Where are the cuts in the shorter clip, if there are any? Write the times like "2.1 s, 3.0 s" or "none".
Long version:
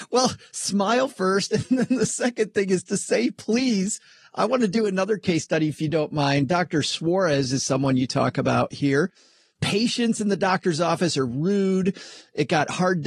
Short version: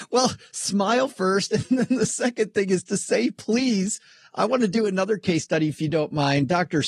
none